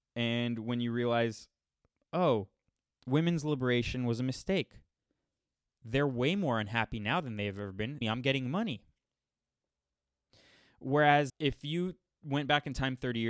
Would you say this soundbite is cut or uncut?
cut